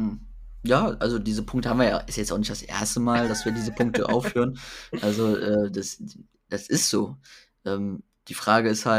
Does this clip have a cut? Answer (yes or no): no